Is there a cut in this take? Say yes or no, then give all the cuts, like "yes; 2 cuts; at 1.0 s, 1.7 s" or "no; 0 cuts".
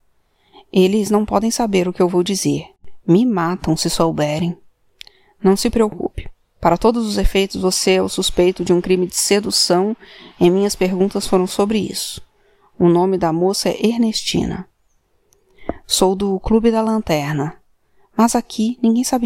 no; 0 cuts